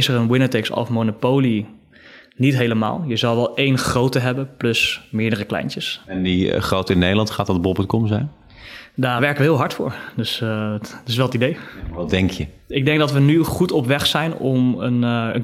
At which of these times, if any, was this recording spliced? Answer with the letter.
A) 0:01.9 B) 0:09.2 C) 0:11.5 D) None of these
B